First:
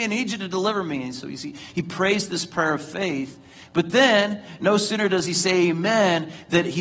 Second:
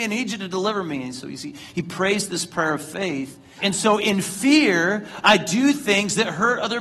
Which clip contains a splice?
second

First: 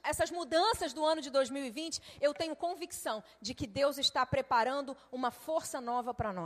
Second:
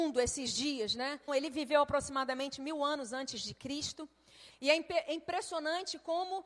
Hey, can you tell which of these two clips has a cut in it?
second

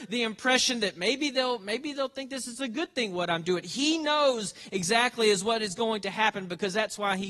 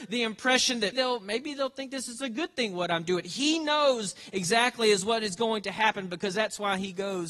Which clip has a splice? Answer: second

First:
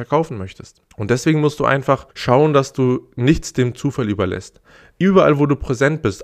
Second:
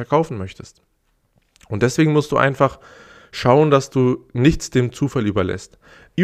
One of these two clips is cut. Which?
first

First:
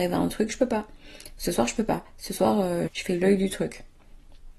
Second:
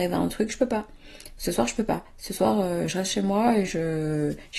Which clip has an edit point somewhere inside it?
first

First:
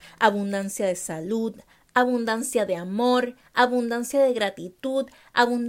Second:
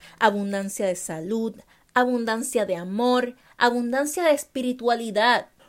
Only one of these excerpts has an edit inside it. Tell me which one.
second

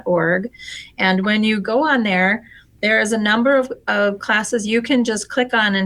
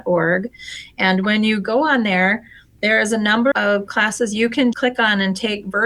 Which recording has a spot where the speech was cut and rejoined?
second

